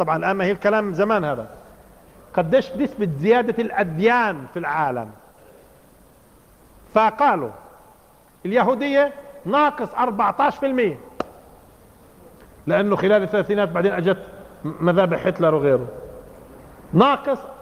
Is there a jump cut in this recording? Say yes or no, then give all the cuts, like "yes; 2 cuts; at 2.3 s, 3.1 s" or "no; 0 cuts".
no; 0 cuts